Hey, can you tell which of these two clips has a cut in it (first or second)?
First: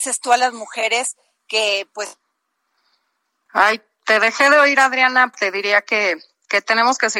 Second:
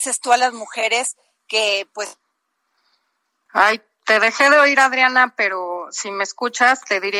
first